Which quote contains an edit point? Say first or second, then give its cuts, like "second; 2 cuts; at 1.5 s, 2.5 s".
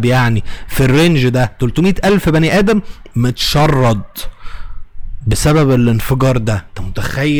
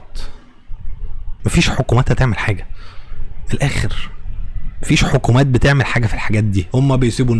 second; 1 cut; at 1.4 s